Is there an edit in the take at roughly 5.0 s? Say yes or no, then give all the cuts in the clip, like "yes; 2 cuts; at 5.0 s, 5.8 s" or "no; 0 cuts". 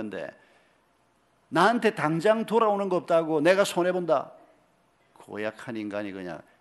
yes; 1 cut; at 5.0 s